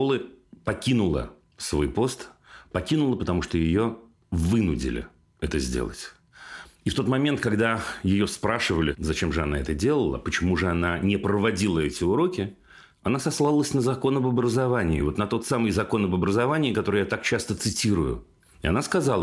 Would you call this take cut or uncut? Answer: uncut